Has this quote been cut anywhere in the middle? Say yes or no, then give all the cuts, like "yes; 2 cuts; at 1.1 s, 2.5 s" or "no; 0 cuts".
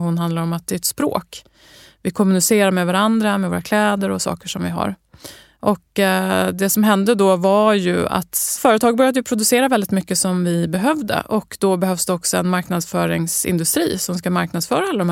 no; 0 cuts